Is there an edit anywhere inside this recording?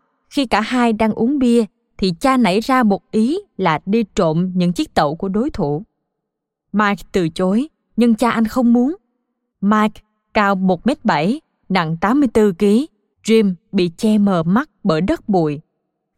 yes; 2 cuts; at 9.5 s, 13.1 s

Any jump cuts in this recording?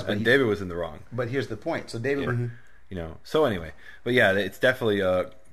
yes; 1 cut; at 2.3 s

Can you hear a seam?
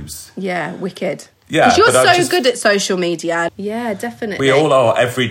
yes; 1 cut; at 3.5 s

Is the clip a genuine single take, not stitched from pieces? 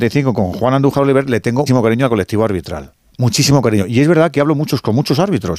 no; 1 cut; at 1.7 s

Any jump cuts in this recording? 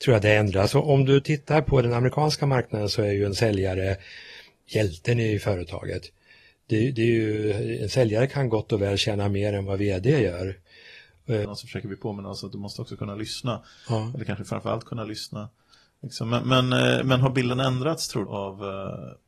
yes; 2 cuts; at 11.4 s, 18.3 s

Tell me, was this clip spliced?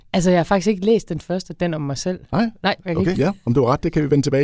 yes; 1 cut; at 3.1 s

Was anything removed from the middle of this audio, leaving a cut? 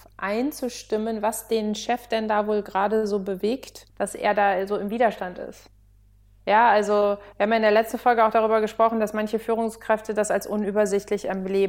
yes; 1 cut; at 3.9 s

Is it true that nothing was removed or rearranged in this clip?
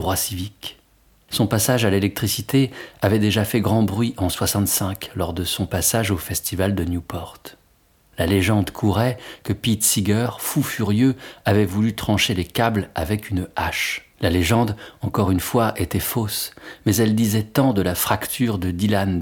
no; 1 cut; at 14.1 s

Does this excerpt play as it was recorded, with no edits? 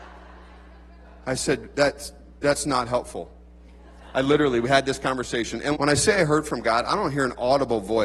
no; 1 cut; at 5.7 s

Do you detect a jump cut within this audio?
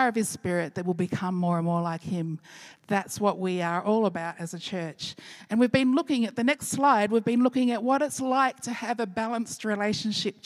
no; 0 cuts

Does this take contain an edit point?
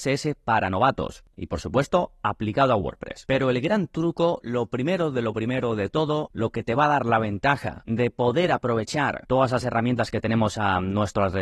no; 0 cuts

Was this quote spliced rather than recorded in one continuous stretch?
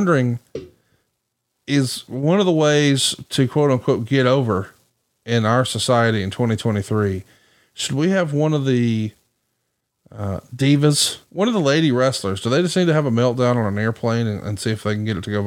yes; 1 cut; at 11.2 s

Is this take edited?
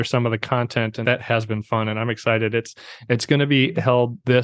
yes; 1 cut; at 1.0 s

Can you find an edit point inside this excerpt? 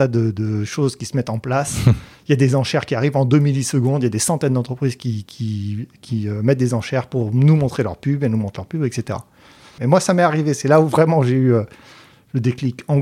yes; 1 cut; at 9.8 s

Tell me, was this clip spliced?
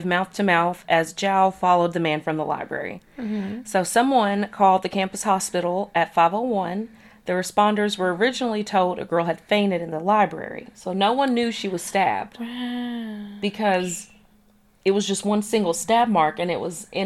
no; 0 cuts

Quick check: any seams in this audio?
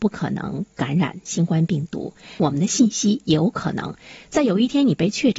no; 0 cuts

